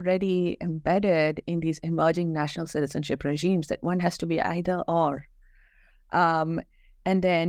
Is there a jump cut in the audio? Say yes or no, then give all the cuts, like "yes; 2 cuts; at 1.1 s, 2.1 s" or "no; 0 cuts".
no; 0 cuts